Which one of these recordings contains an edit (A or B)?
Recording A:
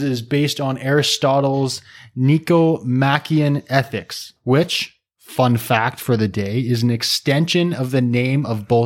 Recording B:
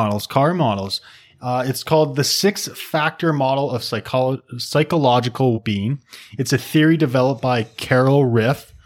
B